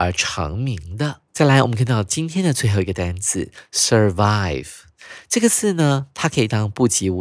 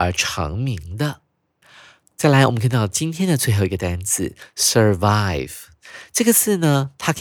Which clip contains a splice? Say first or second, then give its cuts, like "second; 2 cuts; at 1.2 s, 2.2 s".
first; 1 cut; at 1.3 s